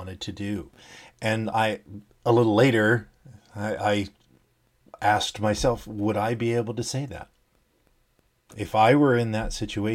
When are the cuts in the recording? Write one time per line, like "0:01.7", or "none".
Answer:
0:02.1